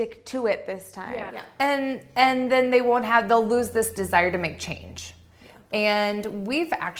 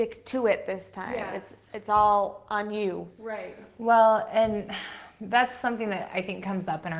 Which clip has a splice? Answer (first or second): first